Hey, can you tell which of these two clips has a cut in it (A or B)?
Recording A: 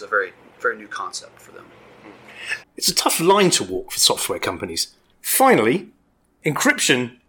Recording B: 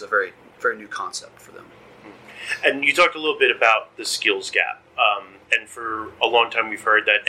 A